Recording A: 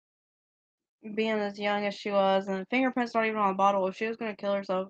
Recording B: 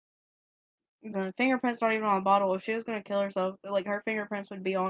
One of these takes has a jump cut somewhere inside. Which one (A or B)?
B